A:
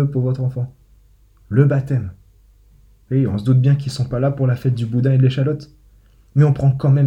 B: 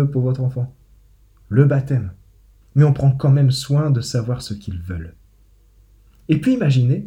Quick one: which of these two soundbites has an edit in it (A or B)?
B